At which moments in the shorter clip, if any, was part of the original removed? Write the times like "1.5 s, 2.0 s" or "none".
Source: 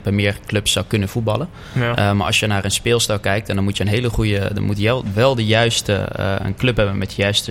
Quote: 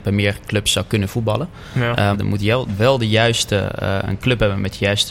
2.1 s